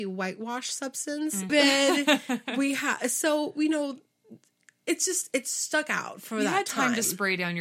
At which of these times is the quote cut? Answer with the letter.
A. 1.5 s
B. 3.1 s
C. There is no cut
A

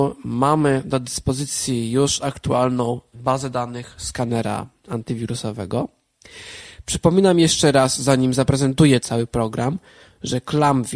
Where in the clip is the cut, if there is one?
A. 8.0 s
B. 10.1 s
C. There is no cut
C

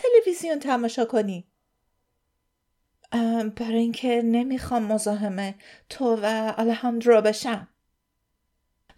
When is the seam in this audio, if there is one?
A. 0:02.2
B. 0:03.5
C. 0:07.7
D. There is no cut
D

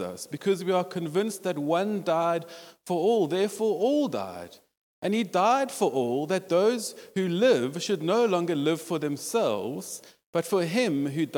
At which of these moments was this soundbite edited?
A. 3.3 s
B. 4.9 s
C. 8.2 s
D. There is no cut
D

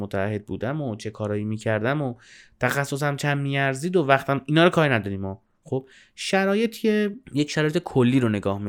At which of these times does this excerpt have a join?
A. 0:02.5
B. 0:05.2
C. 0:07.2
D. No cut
C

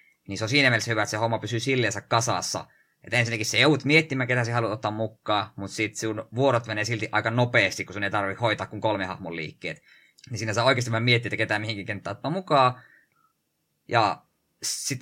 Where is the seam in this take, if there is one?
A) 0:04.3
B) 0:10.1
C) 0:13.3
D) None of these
B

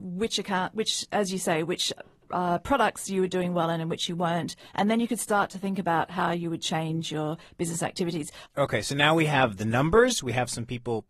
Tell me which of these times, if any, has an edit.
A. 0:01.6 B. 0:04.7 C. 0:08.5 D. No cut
C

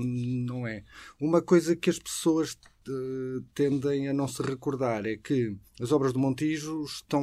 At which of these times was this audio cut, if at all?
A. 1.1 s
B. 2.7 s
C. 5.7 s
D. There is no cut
C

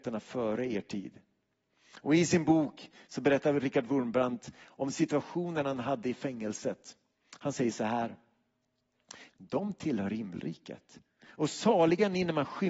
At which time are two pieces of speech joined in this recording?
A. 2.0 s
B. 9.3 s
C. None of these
B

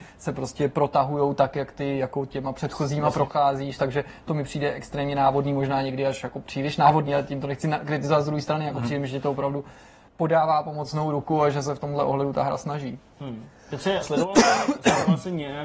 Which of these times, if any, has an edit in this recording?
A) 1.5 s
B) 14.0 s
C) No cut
B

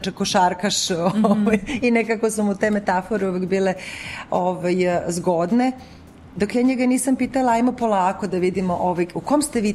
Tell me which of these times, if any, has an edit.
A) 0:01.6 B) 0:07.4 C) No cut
C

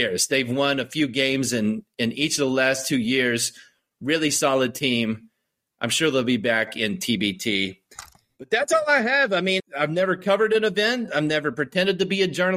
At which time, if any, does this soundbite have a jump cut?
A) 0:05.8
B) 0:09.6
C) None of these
B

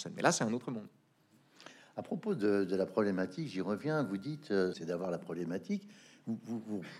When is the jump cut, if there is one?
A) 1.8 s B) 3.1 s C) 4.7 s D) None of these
C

